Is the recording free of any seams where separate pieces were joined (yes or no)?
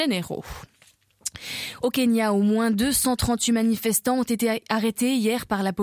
yes